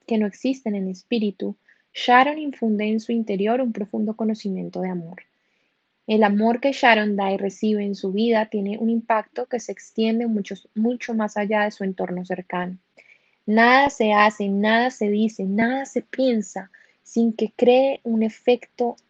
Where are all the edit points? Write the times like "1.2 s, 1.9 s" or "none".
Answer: none